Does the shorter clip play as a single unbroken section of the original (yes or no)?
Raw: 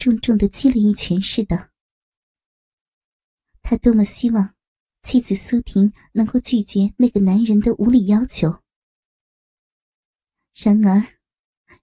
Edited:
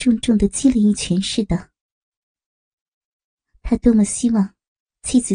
yes